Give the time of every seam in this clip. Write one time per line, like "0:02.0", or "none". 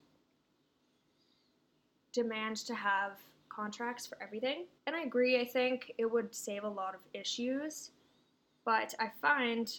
0:04.8